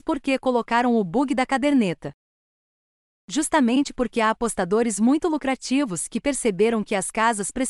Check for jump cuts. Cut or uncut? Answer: uncut